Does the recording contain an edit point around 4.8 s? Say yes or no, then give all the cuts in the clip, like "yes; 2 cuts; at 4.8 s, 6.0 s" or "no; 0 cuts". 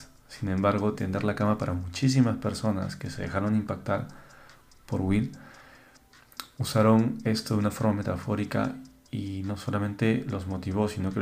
no; 1 cut; at 0.9 s